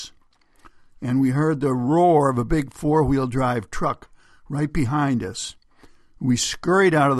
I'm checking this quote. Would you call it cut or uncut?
uncut